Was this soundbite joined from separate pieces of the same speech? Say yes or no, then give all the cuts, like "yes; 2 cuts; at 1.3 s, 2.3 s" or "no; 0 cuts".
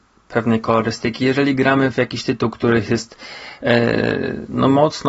no; 0 cuts